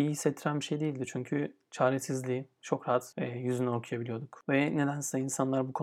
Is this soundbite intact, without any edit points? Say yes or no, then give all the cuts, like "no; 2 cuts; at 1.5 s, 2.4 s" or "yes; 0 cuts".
yes; 0 cuts